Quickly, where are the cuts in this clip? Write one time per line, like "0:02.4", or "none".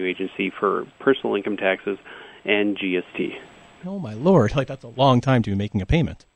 0:03.8